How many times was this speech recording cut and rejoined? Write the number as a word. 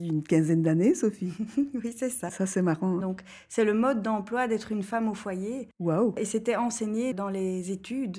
one